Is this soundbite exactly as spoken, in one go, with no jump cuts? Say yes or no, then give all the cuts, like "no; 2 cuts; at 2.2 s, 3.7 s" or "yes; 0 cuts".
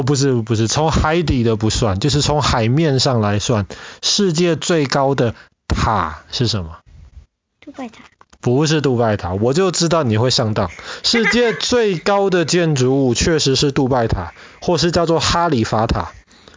yes; 0 cuts